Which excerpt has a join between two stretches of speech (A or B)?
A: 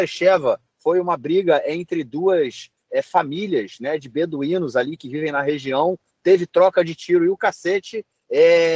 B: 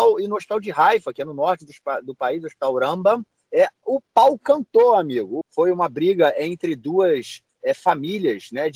B